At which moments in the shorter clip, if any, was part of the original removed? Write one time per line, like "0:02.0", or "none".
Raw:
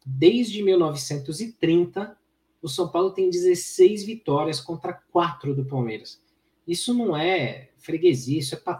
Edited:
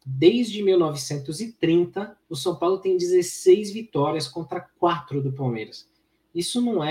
0:02.2

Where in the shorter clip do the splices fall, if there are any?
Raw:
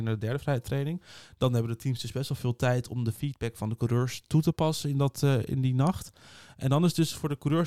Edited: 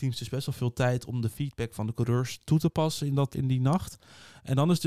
0:03.3

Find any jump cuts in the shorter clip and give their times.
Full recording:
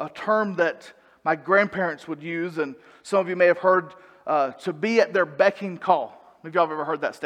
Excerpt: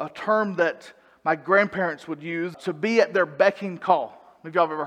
0:02.5

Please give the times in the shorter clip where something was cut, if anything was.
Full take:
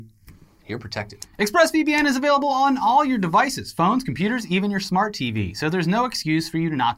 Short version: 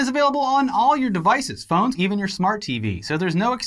0:01.9

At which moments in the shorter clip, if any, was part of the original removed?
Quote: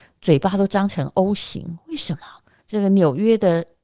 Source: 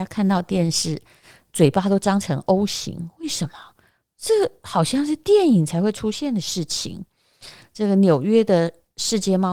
0:02.6

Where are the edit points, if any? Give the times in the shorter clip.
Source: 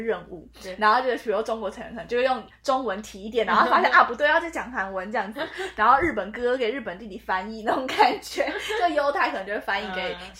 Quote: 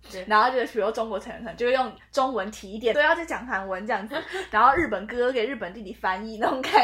0:02.9

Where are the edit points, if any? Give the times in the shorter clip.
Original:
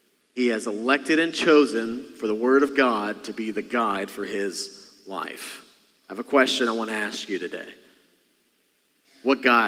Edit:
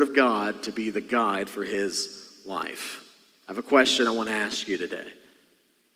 none

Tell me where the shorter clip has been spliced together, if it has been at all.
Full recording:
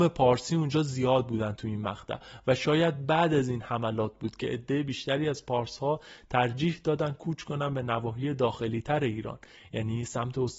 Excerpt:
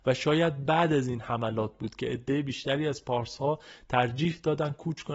none

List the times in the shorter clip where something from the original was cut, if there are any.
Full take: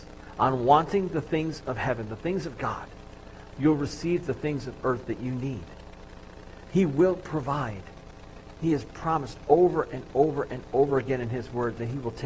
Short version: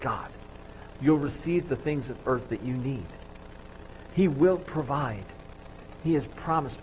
none

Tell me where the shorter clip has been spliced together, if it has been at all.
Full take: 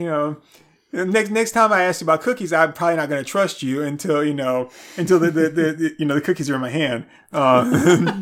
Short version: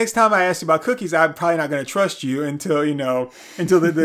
none

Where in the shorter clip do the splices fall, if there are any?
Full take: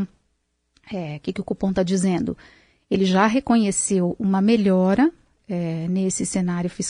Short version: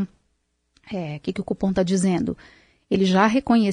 none

